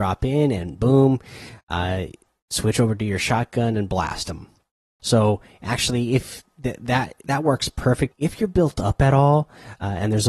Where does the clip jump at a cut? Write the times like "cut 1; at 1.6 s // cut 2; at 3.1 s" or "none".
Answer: cut 1; at 5.0 s // cut 2; at 8.1 s